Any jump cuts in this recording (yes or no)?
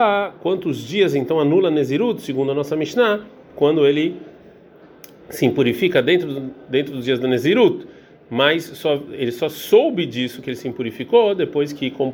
no